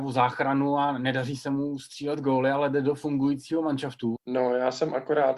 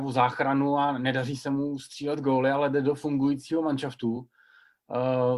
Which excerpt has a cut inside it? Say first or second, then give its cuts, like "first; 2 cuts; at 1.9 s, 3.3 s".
first; 1 cut; at 4.2 s